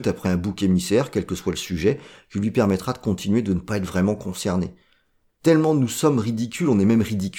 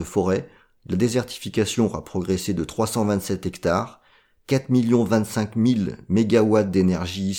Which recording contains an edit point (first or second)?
first